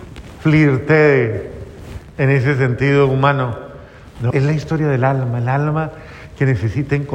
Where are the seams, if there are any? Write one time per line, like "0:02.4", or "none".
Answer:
0:04.3